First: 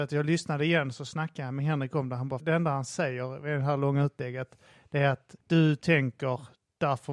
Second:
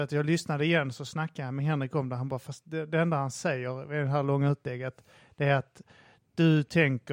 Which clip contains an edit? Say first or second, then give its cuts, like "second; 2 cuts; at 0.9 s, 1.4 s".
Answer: first; 2 cuts; at 2.4 s, 5.4 s